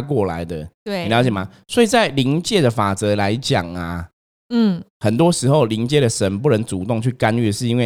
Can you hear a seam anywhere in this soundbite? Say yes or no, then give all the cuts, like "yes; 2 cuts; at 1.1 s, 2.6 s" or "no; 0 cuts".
no; 0 cuts